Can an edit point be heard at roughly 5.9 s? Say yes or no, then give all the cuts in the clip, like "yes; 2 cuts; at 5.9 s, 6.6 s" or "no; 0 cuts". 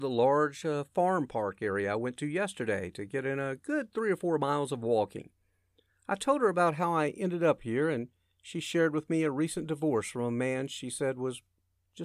yes; 1 cut; at 5.9 s